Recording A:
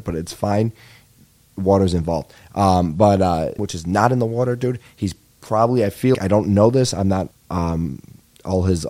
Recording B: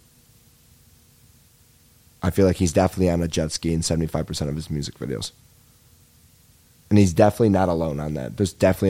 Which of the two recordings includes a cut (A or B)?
A